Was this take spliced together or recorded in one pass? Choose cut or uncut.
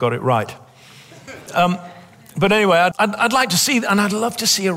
cut